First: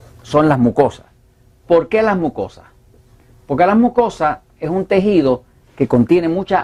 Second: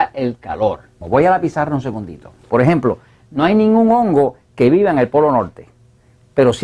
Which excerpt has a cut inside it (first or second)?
second